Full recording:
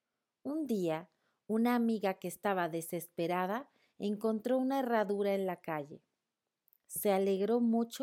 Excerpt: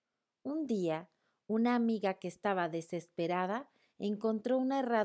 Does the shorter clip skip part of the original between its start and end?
no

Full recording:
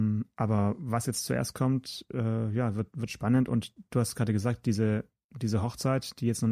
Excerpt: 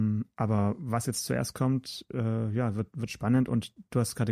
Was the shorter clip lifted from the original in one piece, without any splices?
yes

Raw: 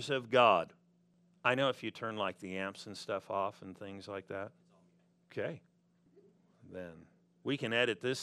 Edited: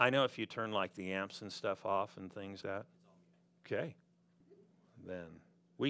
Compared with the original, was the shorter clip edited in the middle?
yes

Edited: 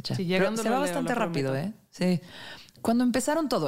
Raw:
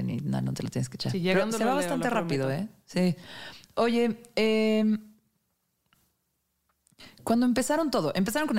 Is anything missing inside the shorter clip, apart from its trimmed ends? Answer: yes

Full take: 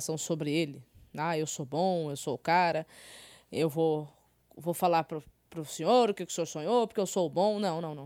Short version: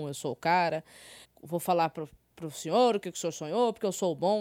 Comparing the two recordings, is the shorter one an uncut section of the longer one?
no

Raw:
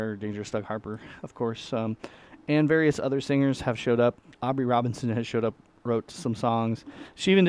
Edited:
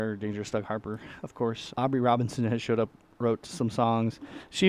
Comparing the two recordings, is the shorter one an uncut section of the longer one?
no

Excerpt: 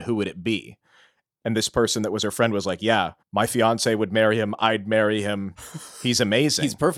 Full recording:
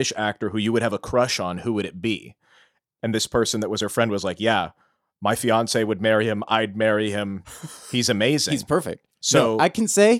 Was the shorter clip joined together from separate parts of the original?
yes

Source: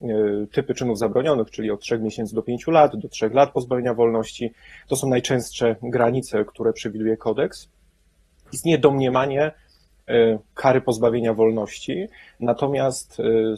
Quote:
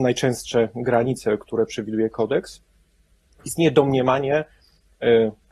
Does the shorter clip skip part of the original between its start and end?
no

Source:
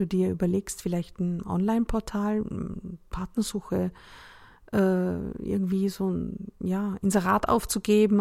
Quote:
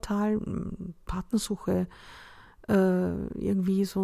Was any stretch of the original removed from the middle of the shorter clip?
no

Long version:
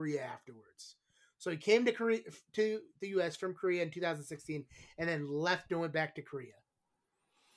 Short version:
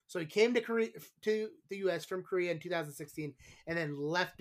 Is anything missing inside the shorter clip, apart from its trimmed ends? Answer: no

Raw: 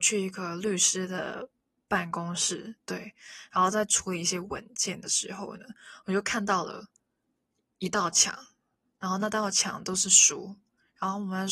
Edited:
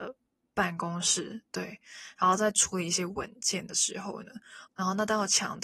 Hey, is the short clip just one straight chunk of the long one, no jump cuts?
no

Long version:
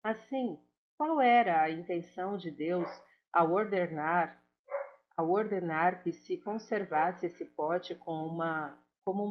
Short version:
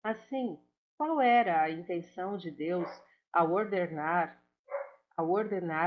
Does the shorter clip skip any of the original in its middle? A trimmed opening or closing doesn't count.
no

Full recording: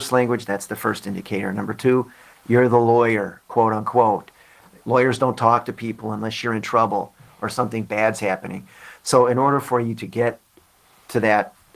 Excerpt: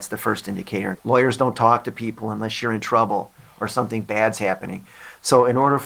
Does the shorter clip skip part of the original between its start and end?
yes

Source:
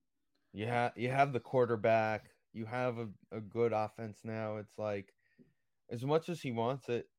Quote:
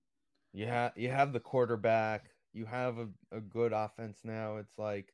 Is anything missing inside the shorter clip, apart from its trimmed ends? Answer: no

